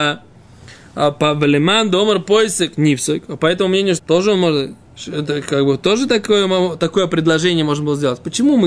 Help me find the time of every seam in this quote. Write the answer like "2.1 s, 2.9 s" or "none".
4.0 s